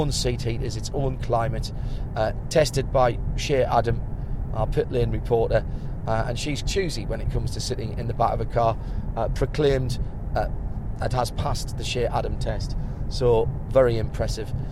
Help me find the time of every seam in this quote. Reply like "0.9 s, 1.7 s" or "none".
6.6 s